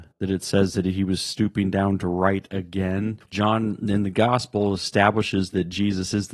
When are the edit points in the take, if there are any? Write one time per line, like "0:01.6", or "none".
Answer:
0:03.2